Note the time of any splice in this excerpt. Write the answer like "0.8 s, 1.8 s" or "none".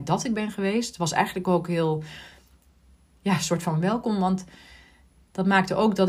none